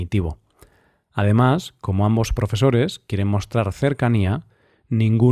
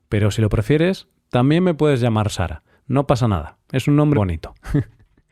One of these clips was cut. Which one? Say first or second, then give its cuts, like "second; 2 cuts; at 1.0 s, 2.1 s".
second; 1 cut; at 4.1 s